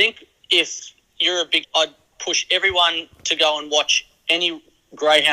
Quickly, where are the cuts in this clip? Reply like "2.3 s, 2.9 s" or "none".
1.6 s